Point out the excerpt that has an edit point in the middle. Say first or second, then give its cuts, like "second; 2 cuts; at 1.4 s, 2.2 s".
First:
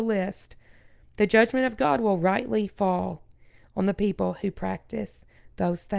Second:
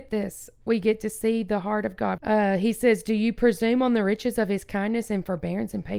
second; 1 cut; at 2.2 s